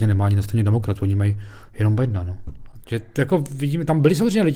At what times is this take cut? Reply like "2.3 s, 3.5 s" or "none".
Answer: 2.8 s